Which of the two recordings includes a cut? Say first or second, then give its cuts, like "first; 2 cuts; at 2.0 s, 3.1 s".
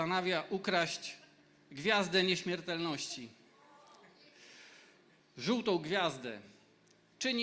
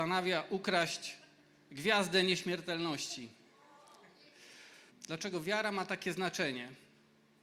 second; 1 cut; at 4.9 s